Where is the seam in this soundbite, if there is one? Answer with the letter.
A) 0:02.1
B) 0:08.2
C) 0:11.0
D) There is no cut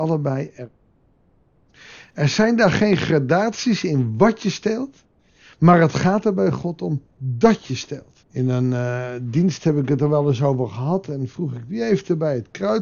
B